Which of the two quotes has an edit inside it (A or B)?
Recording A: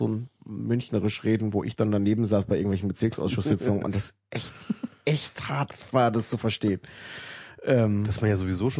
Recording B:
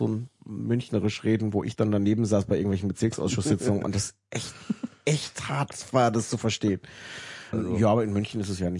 B